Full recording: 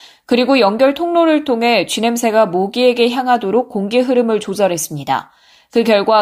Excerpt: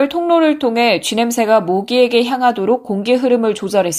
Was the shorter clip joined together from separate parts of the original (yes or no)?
no